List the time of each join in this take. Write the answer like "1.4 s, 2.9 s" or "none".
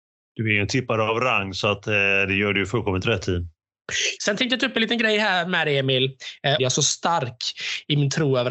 4.2 s, 6.6 s